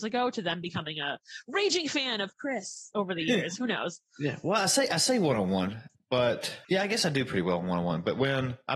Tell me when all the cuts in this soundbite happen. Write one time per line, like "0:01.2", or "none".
0:06.6